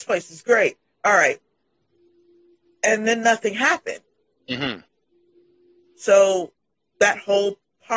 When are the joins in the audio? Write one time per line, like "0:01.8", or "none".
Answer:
none